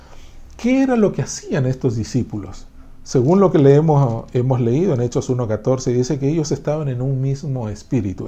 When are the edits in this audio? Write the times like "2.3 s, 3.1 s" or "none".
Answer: none